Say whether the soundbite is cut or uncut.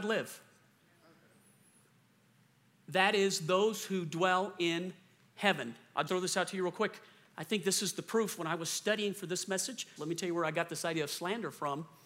cut